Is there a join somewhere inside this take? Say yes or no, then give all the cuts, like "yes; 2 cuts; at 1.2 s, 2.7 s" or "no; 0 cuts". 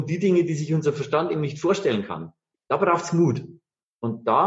no; 0 cuts